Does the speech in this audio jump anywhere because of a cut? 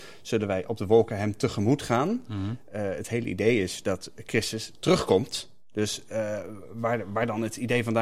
no; 0 cuts

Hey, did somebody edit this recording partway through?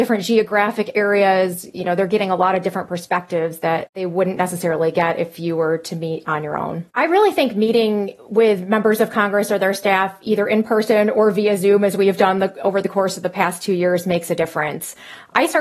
yes; 1 cut; at 6.9 s

